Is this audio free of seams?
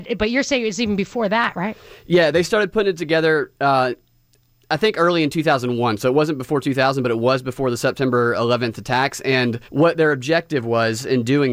no; 1 cut; at 9.6 s

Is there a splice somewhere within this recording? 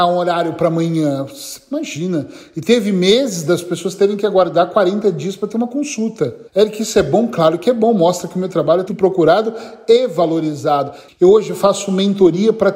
yes; 3 cuts; at 6.5 s, 8.9 s, 11.1 s

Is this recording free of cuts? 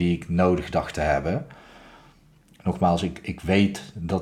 yes; 0 cuts

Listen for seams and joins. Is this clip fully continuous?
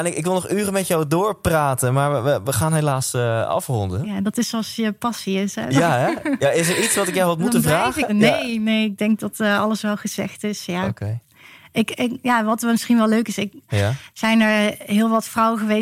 no; 2 cuts; at 8.1 s, 13.7 s

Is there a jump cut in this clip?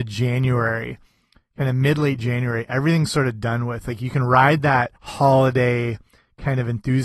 yes; 1 cut; at 5.0 s

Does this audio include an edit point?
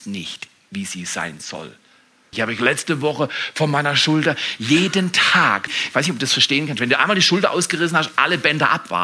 yes; 2 cuts; at 2.3 s, 5.7 s

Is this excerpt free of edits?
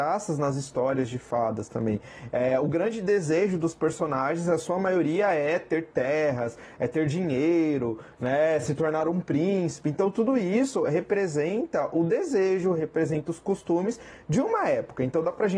yes; 0 cuts

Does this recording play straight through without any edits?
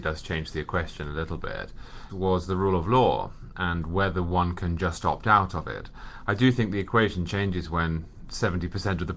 no; 1 cut; at 2.1 s

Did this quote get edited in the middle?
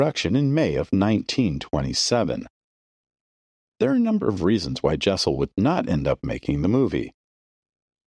no; 0 cuts

